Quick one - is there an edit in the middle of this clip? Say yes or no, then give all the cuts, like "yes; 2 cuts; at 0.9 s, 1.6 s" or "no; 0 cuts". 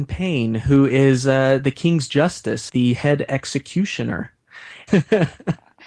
yes; 2 cuts; at 2.7 s, 4.9 s